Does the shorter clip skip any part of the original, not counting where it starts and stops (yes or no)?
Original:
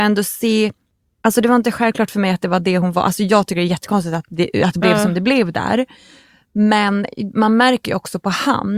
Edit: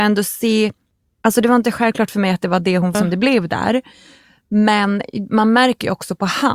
yes